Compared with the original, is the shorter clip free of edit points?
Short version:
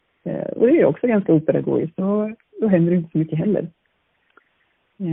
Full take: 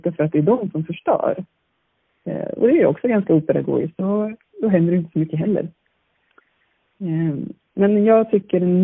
yes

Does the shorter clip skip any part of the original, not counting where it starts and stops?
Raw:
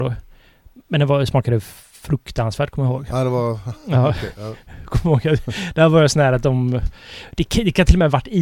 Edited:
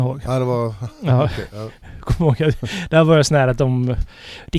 no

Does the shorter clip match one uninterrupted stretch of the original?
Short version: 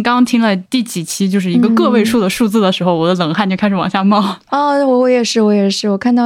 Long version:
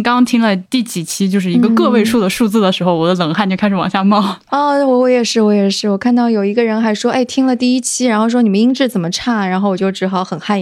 yes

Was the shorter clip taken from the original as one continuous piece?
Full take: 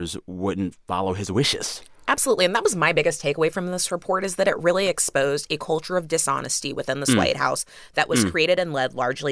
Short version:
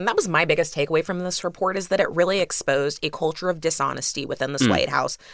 yes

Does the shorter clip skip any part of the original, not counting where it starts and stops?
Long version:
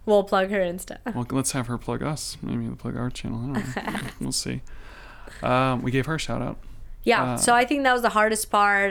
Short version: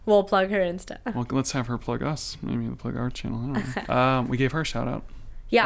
yes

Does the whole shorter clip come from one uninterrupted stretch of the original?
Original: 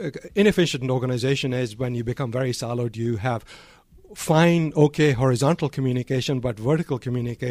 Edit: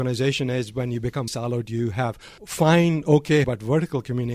no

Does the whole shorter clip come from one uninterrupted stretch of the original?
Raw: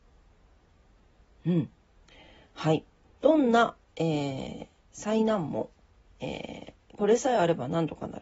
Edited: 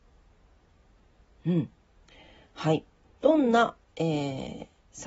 yes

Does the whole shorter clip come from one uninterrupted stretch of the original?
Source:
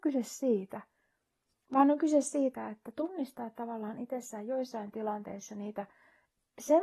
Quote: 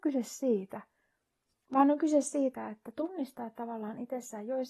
yes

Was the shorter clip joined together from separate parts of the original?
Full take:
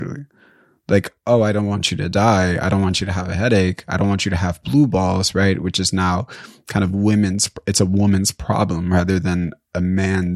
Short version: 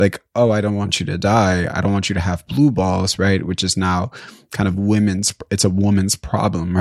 yes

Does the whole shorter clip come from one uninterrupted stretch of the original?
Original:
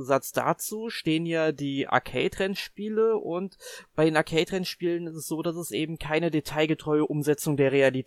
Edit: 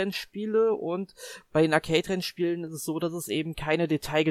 yes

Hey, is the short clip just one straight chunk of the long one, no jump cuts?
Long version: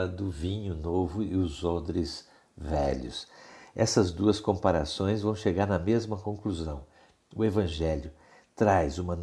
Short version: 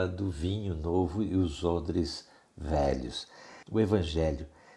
no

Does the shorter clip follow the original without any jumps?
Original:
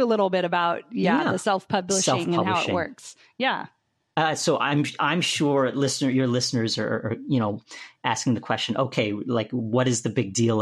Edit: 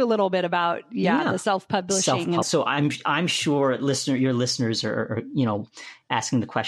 no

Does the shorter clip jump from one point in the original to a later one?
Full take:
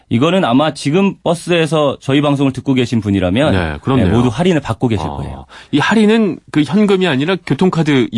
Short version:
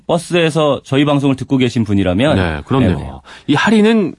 yes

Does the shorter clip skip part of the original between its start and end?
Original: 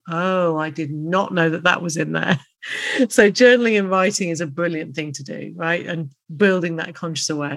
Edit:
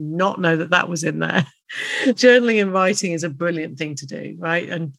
yes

